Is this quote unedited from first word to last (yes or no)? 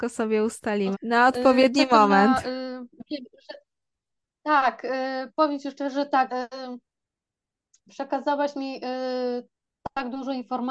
no